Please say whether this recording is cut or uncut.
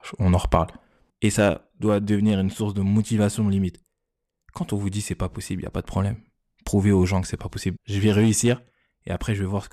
cut